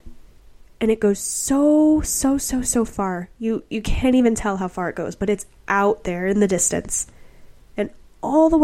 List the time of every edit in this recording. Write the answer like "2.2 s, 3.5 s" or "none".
none

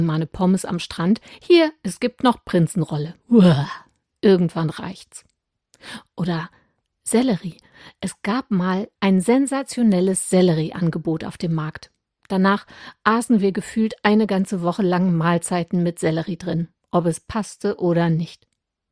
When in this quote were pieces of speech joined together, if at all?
8.9 s

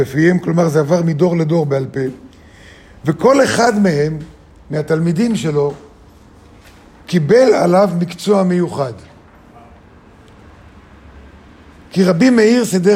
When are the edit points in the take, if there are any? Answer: none

